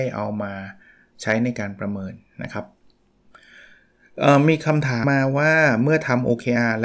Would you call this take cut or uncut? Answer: cut